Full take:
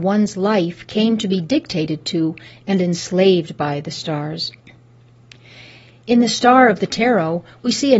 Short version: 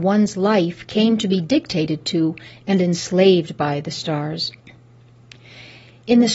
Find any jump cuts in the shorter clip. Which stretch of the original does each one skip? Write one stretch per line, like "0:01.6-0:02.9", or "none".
none